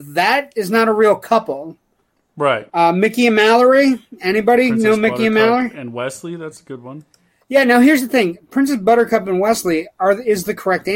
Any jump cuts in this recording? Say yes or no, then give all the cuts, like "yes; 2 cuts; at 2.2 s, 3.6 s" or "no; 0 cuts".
yes; 1 cut; at 2.7 s